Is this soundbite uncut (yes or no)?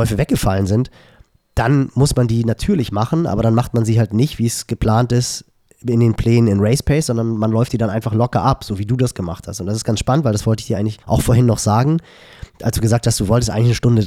no